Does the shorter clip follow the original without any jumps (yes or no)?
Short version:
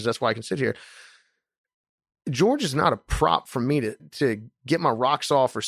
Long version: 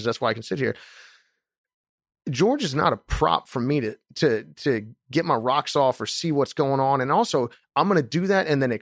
no